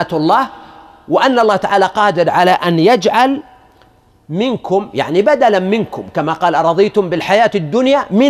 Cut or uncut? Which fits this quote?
uncut